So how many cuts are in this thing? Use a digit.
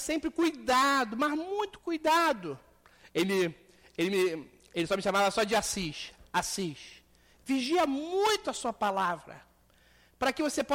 0